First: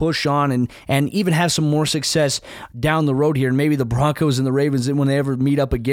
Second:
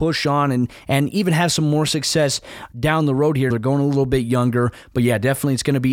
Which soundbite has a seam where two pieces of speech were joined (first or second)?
second